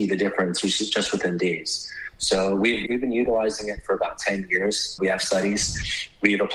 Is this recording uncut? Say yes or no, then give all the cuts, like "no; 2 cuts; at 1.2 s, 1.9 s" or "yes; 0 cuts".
no; 2 cuts; at 2.9 s, 5.0 s